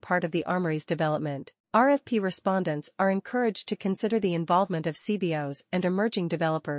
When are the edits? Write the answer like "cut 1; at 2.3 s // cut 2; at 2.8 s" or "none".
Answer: cut 1; at 1.6 s